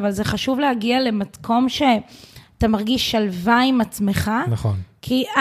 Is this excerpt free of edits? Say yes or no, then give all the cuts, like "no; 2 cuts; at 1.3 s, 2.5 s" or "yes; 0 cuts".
yes; 0 cuts